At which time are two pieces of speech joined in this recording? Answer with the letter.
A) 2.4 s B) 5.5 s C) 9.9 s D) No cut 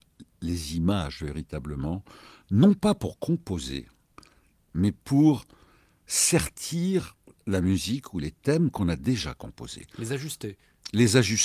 D